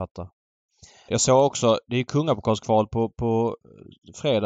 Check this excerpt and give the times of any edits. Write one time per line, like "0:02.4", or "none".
0:01.1